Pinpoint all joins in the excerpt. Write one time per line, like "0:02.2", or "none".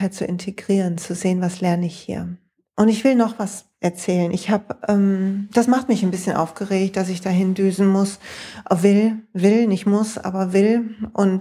none